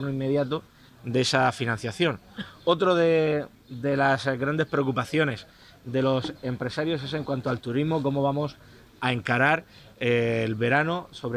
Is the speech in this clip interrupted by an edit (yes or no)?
no